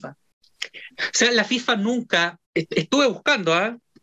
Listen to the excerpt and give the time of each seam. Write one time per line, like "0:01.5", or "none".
0:00.9
0:02.4